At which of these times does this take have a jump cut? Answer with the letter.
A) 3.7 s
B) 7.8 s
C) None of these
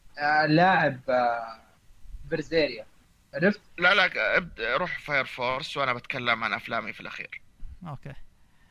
A